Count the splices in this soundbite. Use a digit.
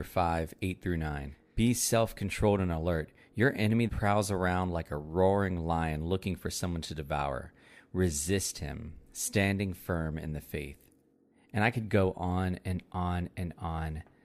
1